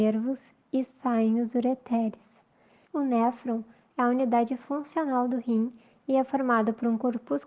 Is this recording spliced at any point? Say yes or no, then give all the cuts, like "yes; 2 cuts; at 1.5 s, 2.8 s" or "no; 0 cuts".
yes; 1 cut; at 2.9 s